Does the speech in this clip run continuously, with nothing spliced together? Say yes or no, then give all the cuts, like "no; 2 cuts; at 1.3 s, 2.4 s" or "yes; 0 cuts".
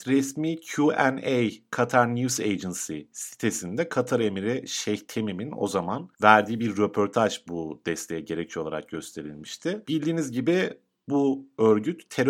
no; 2 cuts; at 6.1 s, 9.9 s